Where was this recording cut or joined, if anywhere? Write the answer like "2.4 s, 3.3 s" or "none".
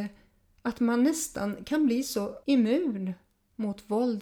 2.4 s